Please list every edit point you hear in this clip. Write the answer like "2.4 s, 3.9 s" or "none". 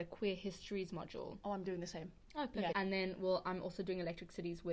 2.7 s